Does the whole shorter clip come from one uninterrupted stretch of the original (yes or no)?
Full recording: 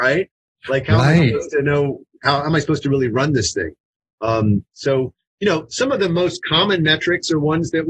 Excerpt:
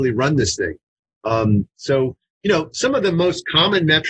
yes